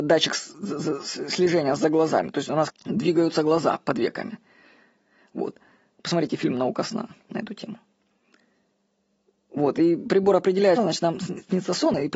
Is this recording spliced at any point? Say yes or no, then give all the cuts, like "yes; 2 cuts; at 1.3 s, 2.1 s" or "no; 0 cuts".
yes; 2 cuts; at 2.7 s, 10.8 s